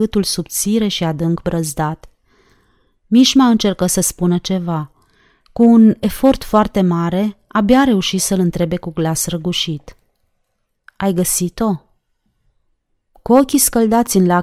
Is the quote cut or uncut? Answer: uncut